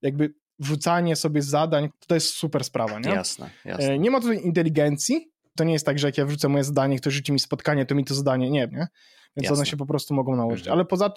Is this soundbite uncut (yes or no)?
no